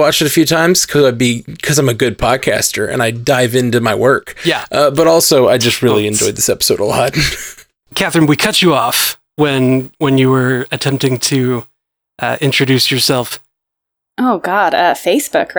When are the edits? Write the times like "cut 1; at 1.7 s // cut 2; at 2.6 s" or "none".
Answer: cut 1; at 14.0 s